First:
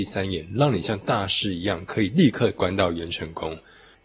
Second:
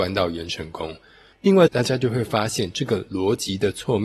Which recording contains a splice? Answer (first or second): second